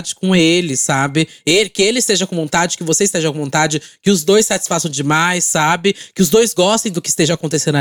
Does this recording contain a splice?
no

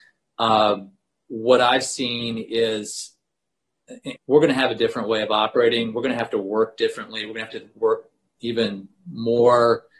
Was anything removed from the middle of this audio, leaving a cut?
yes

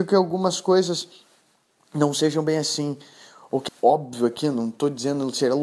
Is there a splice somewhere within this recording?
yes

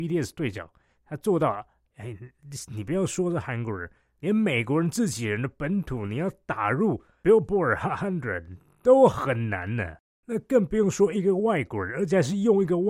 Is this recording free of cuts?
no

